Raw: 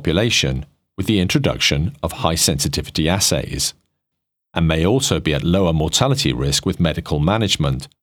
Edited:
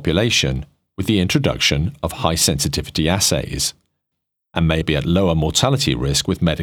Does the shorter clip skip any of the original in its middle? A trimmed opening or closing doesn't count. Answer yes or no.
yes